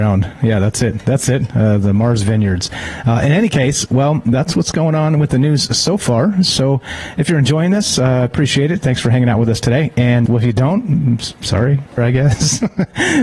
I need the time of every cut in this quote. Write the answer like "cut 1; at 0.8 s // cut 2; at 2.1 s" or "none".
cut 1; at 10.3 s // cut 2; at 12.0 s

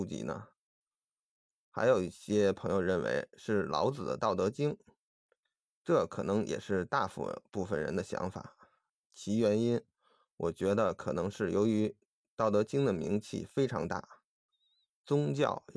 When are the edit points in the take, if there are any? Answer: none

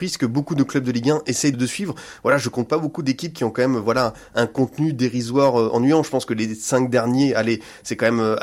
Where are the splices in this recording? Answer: cut 1; at 1.5 s

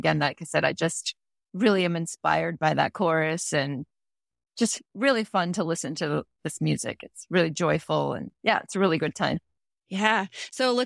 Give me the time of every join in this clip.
none

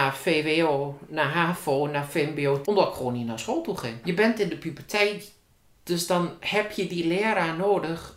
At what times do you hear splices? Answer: cut 1; at 2.6 s // cut 2; at 4.0 s // cut 3; at 5.7 s

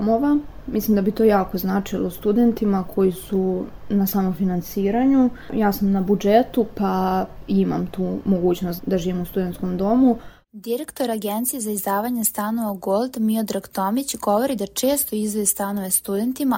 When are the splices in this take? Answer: cut 1; at 8.8 s

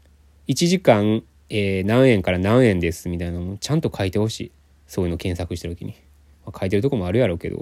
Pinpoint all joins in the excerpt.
none

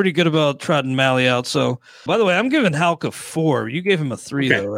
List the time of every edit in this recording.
cut 1; at 2.1 s

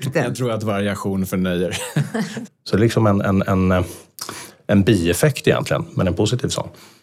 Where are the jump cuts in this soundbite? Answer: cut 1; at 2.5 s

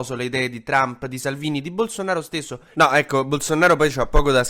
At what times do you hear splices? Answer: cut 1; at 2.7 s

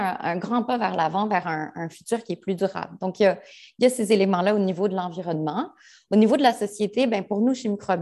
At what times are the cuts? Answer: none

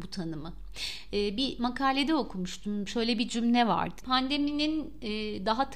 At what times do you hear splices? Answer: cut 1; at 4.0 s

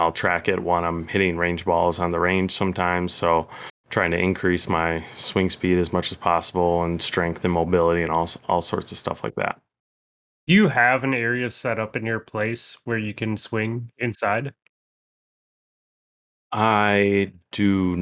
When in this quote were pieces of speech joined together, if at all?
none

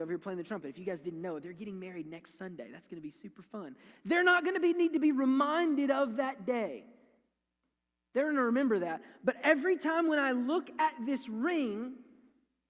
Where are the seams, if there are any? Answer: none

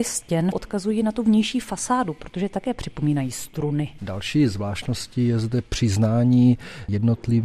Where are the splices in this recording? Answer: cut 1; at 4.0 s

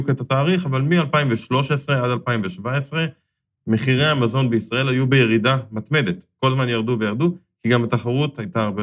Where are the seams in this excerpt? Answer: none

